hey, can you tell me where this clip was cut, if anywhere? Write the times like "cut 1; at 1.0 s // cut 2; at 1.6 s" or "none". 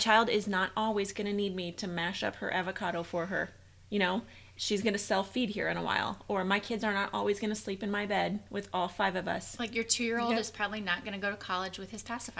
none

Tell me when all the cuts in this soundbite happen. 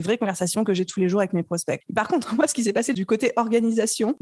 cut 1; at 1.8 s

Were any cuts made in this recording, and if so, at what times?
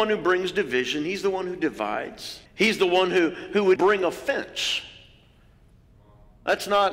cut 1; at 2.5 s // cut 2; at 3.8 s

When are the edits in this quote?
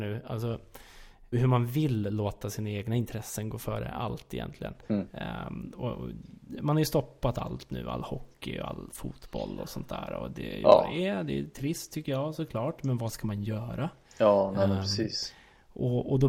cut 1; at 1.3 s

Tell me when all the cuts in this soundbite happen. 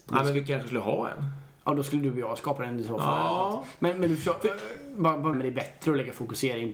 cut 1; at 5.3 s

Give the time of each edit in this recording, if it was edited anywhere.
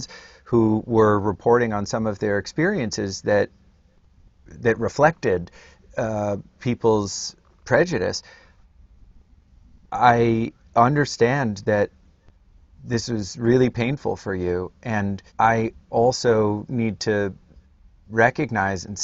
cut 1; at 15.3 s

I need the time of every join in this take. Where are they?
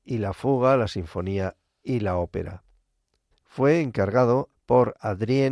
cut 1; at 3.3 s // cut 2; at 4.5 s

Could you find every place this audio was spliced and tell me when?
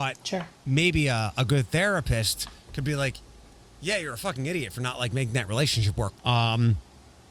cut 1; at 6.1 s

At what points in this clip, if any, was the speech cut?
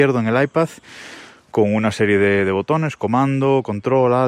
none

